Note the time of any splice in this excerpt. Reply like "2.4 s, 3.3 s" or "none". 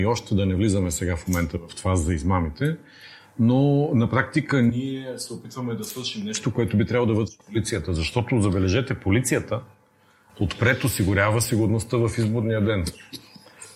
none